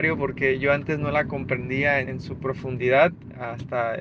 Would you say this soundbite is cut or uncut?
cut